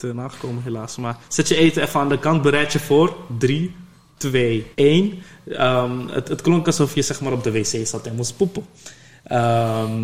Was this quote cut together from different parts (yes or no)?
yes